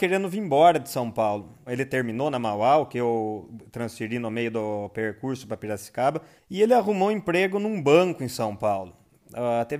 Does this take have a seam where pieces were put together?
yes; 2 cuts; at 1.7 s, 6.4 s

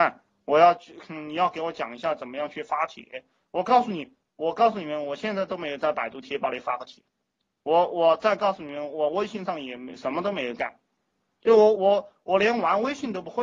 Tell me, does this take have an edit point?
yes; 1 cut; at 11.7 s

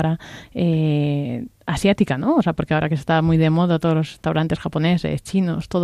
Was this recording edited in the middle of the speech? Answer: no; 0 cuts

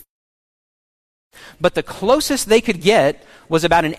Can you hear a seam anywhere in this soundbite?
no; 0 cuts

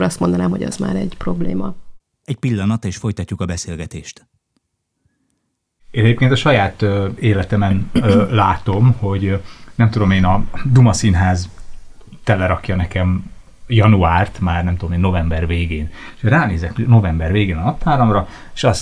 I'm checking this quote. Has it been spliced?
no; 0 cuts

